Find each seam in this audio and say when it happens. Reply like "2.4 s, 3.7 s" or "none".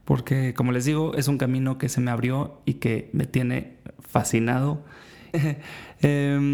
5.3 s